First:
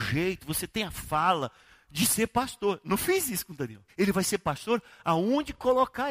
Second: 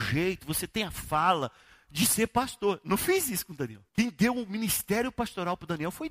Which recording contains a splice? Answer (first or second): first